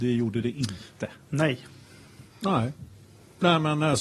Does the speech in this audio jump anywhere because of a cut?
yes; 1 cut; at 2.3 s

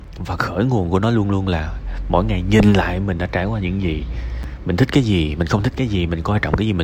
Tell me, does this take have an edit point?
no; 0 cuts

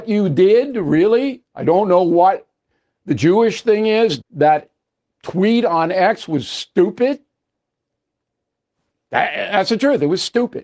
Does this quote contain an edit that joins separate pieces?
yes; 1 cut; at 4.2 s

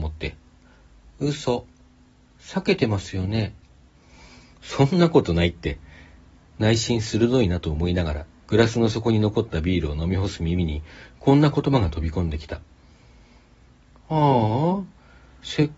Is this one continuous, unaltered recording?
yes; 0 cuts

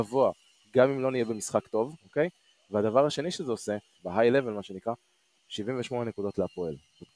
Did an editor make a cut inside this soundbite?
yes; 2 cuts; at 2.0 s, 4.0 s

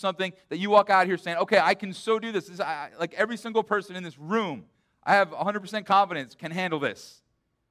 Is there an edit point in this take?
no; 0 cuts

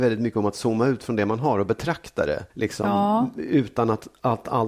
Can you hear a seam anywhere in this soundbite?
yes; 1 cut; at 2.5 s

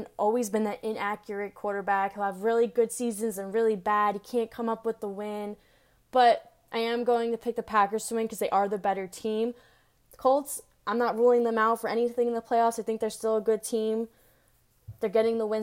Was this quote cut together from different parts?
no; 0 cuts

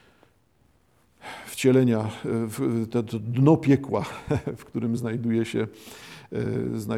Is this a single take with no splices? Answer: yes; 0 cuts

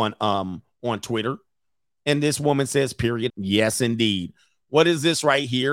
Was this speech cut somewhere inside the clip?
yes; 1 cut; at 3.3 s

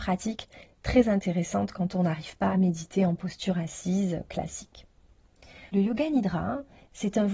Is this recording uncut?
no; 1 cut; at 5.7 s

